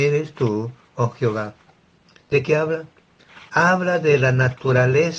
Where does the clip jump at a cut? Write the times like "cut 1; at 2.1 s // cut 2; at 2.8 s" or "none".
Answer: none